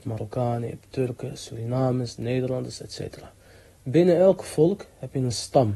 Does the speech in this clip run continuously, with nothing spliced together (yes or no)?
yes